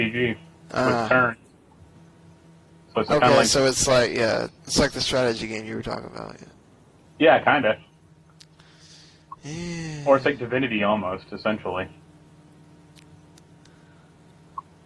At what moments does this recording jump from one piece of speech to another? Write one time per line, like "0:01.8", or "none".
0:04.6